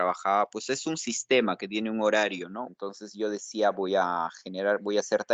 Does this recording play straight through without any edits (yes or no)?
no